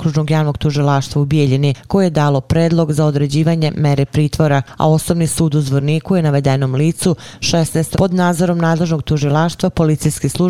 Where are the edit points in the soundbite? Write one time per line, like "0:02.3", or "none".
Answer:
0:07.9